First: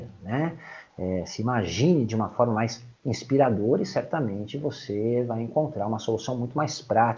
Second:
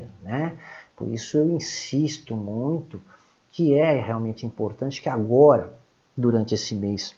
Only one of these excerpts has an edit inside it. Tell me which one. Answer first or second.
first